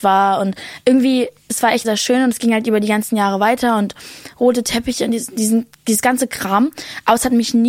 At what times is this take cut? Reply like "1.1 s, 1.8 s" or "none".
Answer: 1.8 s